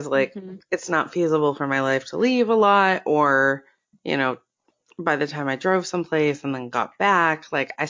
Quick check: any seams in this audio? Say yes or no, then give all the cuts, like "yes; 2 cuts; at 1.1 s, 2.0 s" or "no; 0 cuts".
no; 0 cuts